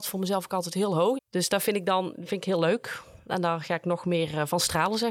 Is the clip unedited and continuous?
no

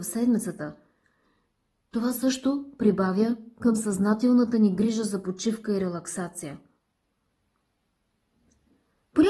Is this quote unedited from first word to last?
yes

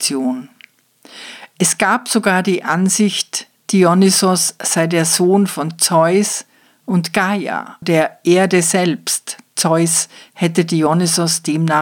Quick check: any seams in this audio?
yes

